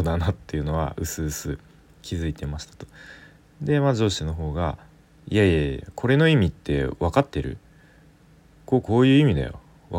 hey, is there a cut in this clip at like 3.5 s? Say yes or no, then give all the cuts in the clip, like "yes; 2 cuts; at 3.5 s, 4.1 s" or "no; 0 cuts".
no; 1 cut; at 8.8 s